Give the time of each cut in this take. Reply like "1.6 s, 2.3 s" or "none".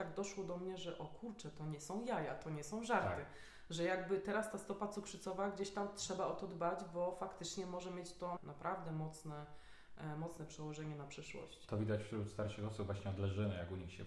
8.4 s